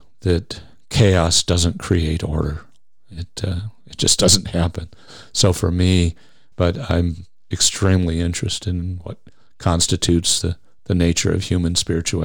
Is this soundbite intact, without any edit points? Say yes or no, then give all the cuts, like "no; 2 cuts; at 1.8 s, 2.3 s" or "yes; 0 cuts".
no; 1 cut; at 6.5 s